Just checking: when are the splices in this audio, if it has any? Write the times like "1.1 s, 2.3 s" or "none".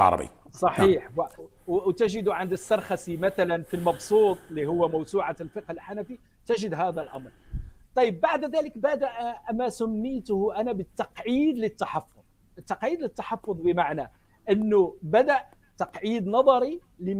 1.4 s